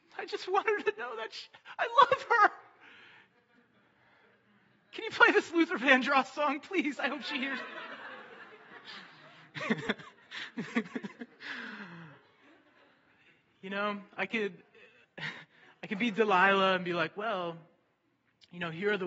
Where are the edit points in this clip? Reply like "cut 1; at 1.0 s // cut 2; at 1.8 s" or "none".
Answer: none